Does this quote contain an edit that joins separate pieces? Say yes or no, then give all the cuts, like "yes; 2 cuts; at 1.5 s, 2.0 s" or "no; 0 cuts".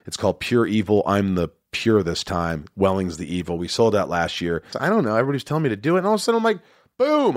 yes; 1 cut; at 4.7 s